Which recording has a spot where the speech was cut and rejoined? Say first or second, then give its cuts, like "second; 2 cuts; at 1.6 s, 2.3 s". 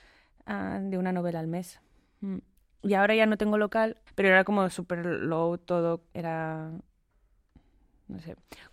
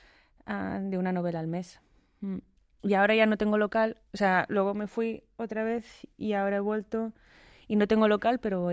first; 2 cuts; at 4.1 s, 6.1 s